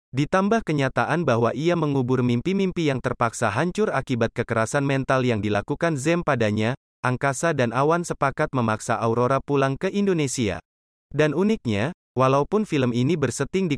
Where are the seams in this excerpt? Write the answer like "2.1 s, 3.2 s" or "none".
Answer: 10.9 s

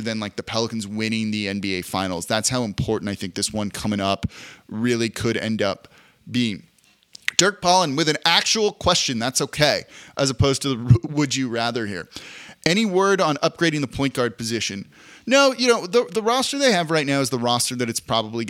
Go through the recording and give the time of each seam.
none

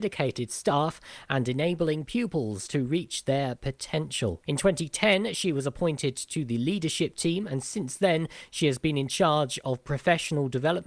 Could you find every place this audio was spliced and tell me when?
4.5 s

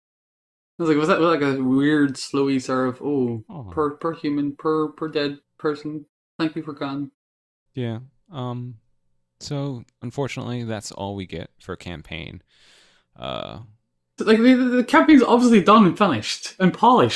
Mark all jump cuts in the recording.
14.2 s

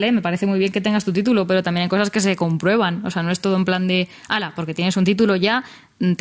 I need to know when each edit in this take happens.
none

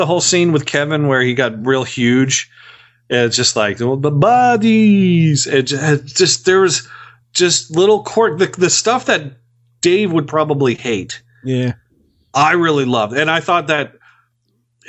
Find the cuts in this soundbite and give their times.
none

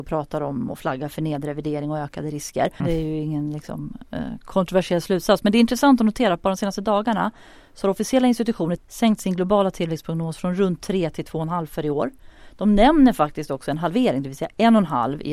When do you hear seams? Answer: 2.8 s, 8.8 s

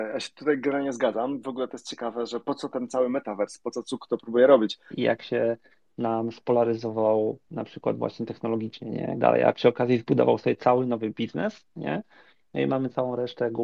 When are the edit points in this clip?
4.9 s, 9.2 s

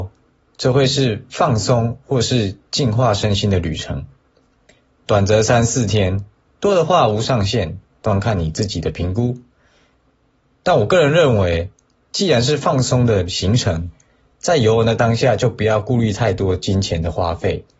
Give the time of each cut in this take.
none

